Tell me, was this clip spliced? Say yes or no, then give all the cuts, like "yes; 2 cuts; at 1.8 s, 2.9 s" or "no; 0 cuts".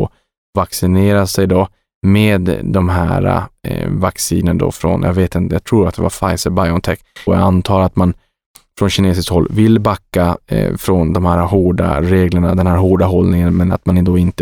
yes; 1 cut; at 7.3 s